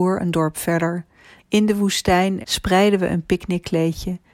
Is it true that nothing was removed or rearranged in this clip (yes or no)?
no